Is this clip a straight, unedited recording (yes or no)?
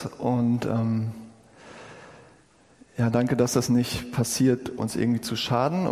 no